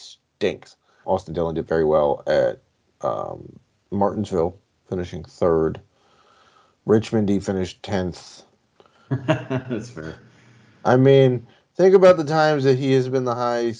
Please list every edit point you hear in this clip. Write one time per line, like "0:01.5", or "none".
0:01.0
0:08.8